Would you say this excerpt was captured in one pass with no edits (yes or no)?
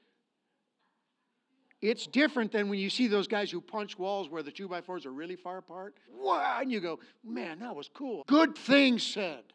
no